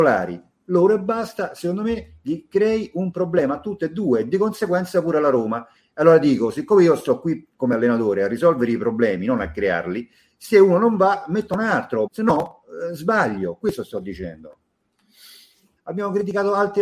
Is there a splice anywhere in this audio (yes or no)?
yes